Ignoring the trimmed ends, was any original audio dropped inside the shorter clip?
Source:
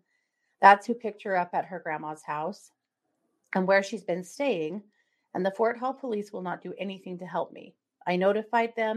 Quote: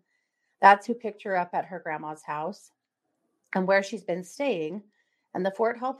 no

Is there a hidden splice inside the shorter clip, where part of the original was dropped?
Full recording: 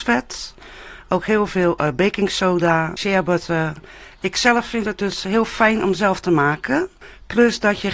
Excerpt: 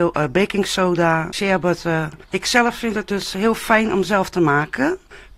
yes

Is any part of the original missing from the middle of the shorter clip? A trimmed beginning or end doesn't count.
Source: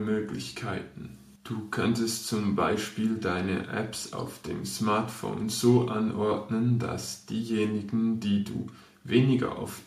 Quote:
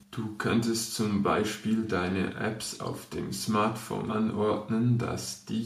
yes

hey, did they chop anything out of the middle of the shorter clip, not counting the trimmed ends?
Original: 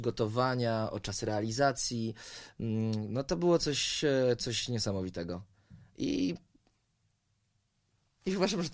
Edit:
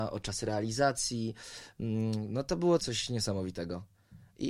yes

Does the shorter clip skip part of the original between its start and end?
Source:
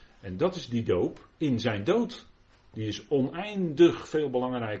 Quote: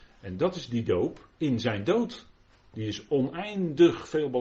no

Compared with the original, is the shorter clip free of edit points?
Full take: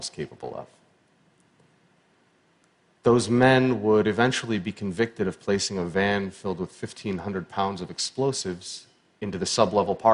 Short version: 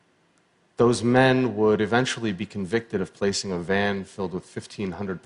yes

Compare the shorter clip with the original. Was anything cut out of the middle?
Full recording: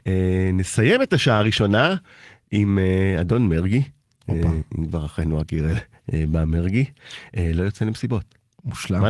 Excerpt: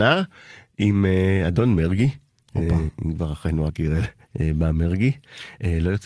no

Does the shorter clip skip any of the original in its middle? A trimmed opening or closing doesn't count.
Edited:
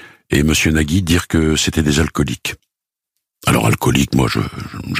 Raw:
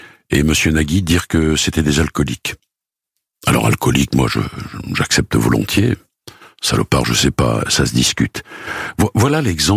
no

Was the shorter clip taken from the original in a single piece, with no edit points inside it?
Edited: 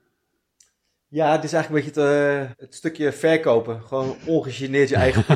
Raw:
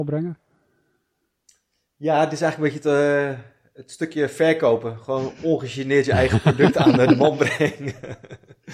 no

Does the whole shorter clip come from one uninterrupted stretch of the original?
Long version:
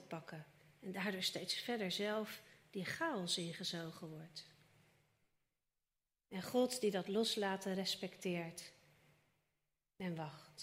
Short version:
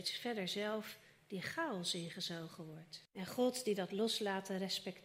no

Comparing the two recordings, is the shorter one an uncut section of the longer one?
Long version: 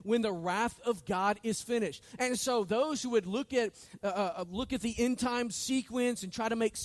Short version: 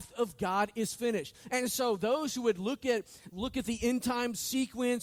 no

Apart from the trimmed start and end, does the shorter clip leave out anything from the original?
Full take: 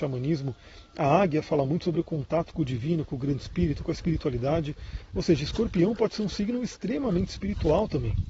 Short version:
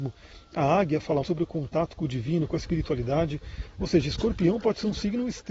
yes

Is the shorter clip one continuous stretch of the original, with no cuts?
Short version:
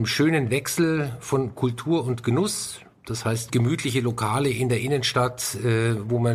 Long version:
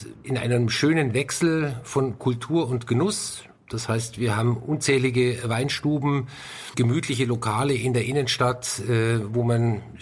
no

